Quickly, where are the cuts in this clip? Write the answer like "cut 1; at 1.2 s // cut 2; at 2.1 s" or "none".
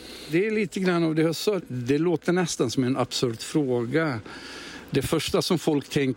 cut 1; at 1.6 s